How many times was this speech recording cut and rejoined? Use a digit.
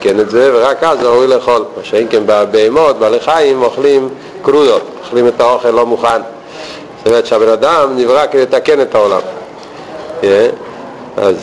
0